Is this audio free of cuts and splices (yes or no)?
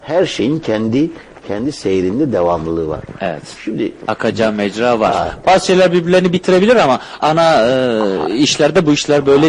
no